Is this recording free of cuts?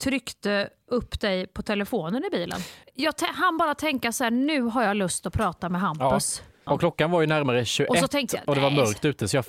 no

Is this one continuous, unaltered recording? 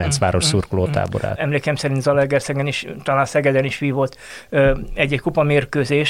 no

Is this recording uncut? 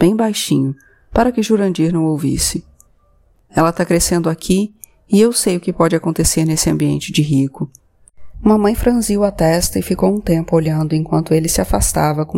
no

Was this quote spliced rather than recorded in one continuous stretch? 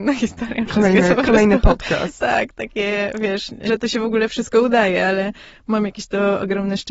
yes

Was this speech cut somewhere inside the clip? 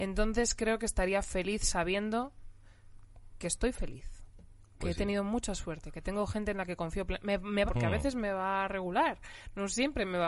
yes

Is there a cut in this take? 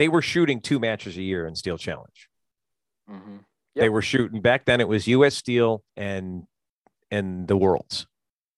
yes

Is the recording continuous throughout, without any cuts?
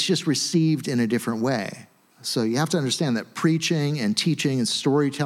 yes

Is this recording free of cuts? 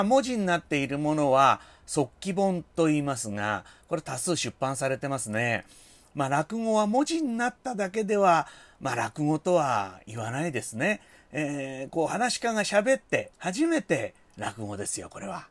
no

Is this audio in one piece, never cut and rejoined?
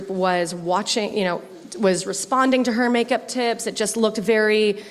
yes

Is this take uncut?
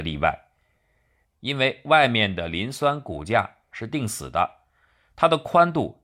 no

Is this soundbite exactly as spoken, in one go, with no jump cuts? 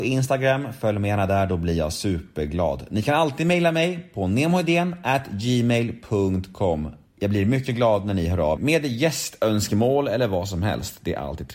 no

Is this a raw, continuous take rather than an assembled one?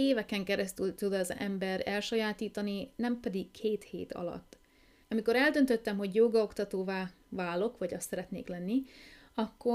no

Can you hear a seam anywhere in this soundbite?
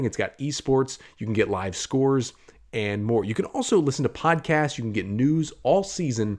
no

